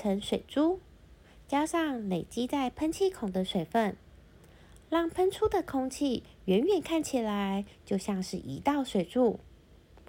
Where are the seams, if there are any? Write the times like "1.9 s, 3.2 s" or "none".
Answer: none